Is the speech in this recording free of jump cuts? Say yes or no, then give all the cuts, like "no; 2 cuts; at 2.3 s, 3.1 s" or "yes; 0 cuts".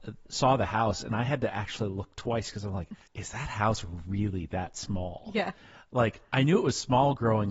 no; 1 cut; at 3.0 s